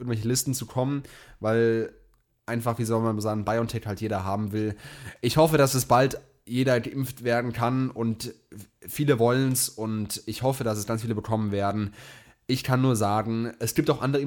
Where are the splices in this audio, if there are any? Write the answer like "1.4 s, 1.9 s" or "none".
none

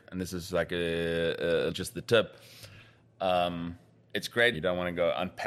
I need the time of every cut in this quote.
1.7 s, 4.5 s

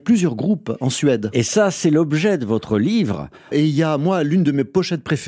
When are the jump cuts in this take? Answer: 3.5 s

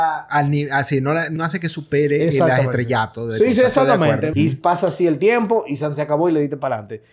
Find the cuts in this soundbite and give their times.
1.4 s, 4.3 s

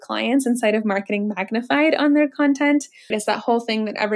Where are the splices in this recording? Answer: 3.1 s

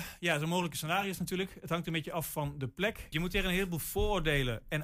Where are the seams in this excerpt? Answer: 3.1 s

